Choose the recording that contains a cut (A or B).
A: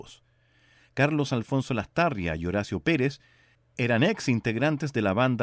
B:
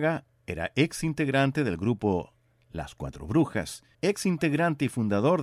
B